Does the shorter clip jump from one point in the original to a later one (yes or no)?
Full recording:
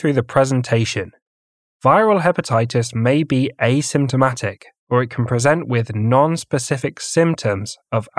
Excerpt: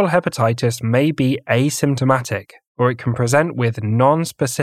no